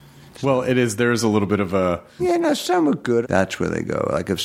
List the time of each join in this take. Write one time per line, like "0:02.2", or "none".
0:02.2
0:03.2